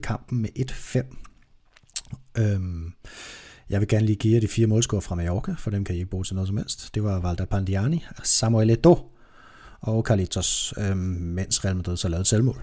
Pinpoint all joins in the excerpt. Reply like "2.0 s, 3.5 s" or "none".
8.2 s